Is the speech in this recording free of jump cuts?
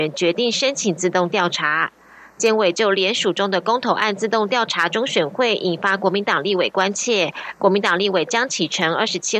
yes; 0 cuts

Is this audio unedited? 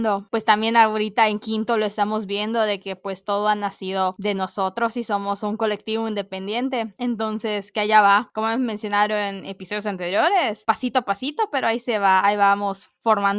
yes; 0 cuts

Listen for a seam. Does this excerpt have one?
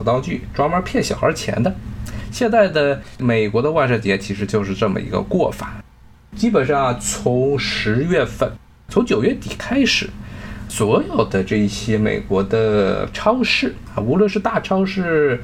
no; 0 cuts

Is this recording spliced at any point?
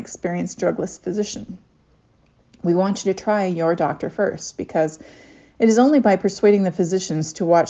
no; 0 cuts

